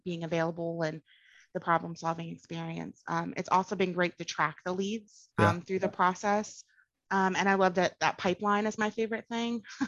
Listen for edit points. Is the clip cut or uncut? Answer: cut